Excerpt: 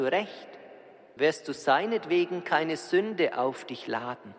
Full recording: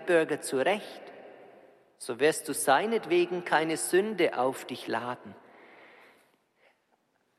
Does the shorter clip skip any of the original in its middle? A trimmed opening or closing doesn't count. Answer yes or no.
yes